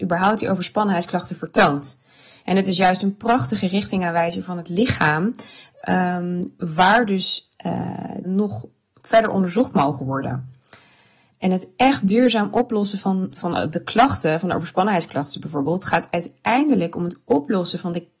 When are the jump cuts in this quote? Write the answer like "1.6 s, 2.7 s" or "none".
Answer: 8.2 s